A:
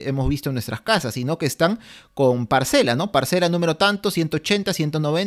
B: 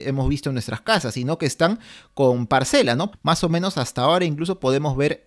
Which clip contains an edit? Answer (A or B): B